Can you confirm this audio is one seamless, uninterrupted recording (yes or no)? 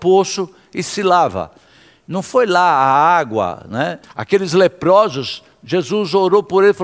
no